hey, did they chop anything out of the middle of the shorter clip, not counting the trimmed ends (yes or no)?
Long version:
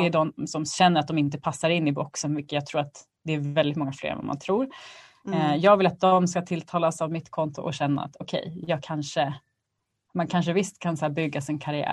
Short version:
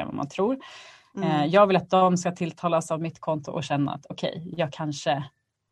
no